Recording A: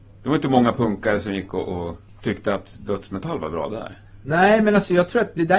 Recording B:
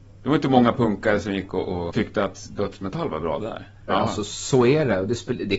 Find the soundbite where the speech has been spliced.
B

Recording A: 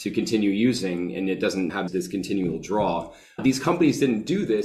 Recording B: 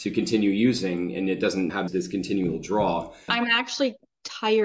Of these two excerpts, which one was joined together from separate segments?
B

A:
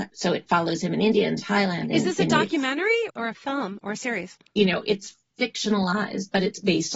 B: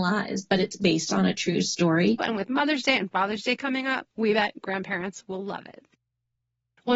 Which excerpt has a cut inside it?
B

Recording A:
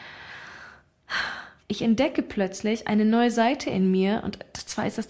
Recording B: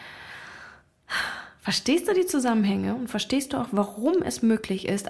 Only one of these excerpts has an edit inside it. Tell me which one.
A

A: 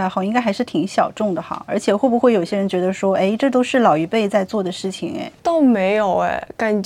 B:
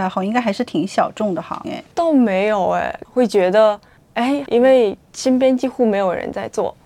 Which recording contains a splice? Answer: B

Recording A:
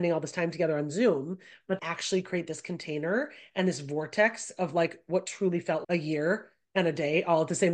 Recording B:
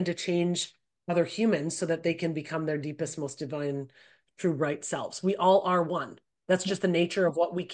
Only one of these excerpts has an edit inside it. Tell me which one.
A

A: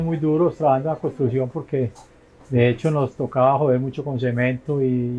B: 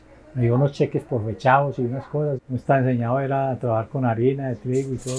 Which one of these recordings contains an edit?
B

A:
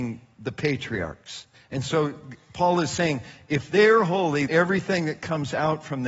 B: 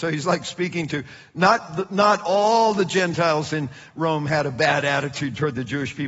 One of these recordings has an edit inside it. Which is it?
A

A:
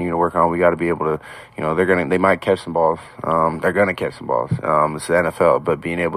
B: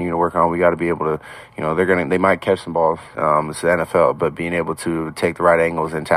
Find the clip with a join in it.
B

